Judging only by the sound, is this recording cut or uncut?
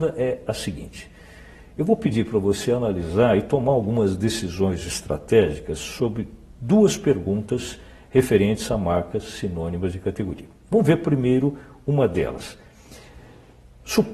uncut